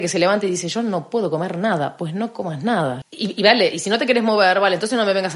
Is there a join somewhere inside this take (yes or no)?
yes